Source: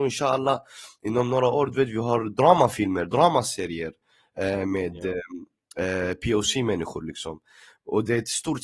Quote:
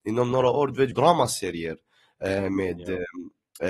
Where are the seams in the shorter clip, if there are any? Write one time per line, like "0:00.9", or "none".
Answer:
0:00.9